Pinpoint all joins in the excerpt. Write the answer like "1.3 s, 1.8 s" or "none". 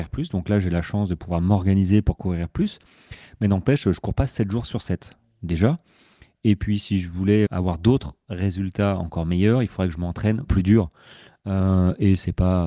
7.5 s, 10.5 s